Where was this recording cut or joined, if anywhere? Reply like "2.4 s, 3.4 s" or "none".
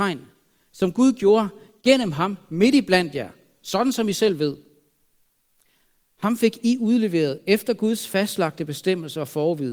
none